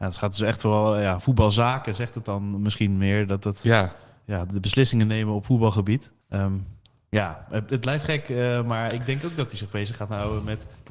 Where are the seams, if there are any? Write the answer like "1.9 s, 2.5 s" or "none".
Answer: 6.2 s